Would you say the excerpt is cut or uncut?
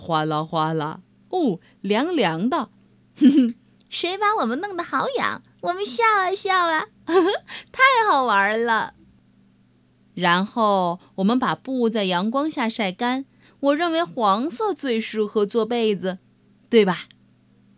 uncut